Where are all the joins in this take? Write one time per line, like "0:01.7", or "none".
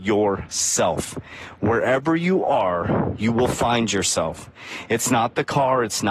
none